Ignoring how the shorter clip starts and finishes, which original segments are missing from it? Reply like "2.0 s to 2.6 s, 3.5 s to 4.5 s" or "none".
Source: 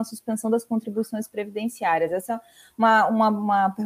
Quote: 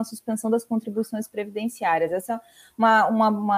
none